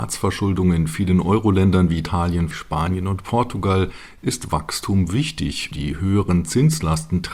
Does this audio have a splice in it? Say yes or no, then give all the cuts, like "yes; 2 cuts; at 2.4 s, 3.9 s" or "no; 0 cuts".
yes; 2 cuts; at 2.5 s, 5.7 s